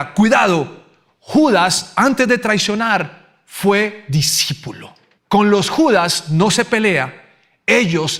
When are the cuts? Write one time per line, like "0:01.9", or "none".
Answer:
0:05.2